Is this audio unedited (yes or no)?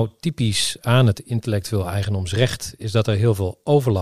yes